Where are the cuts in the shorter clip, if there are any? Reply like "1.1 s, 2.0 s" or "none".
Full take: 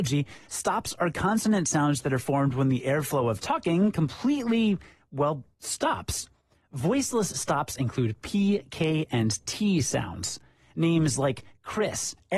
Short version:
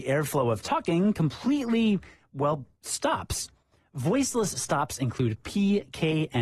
none